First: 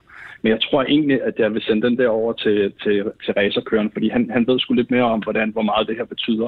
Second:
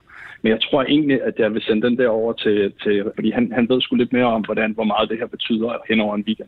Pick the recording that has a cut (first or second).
second